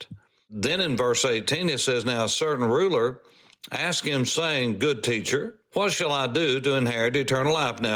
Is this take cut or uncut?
uncut